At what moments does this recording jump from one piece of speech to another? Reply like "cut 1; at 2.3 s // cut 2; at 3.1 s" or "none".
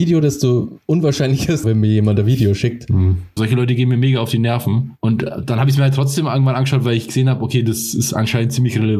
cut 1; at 1.6 s // cut 2; at 3.4 s

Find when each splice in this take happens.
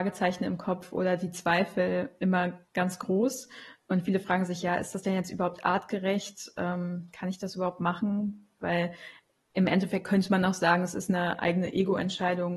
none

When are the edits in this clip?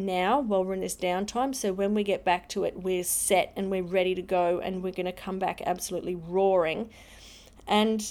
none

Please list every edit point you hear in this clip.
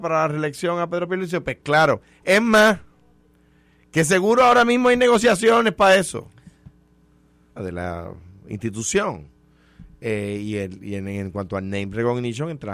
cut 1; at 7.6 s

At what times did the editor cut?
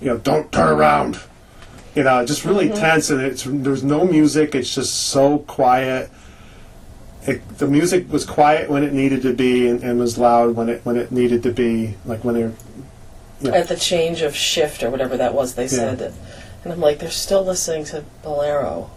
cut 1; at 13.5 s

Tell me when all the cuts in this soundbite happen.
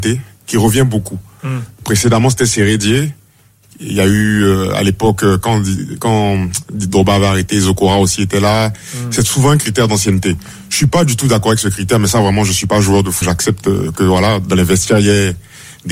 cut 1; at 13.2 s

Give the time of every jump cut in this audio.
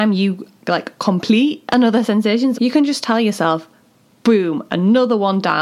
cut 1; at 2.5 s

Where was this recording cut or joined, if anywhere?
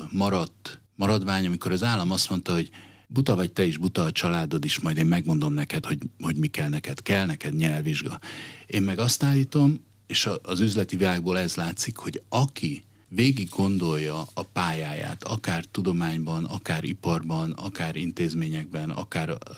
none

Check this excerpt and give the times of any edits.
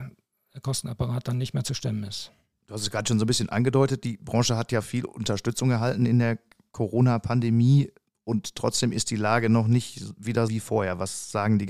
cut 1; at 2.5 s // cut 2; at 10.5 s

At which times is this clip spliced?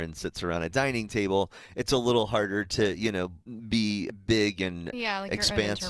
none

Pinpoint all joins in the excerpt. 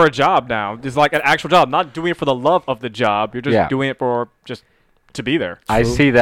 none

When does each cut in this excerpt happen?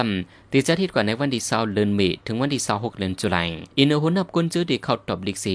cut 1; at 3.7 s

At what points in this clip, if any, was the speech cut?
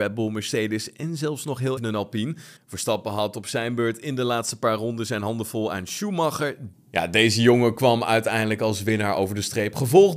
cut 1; at 1.8 s // cut 2; at 6.7 s

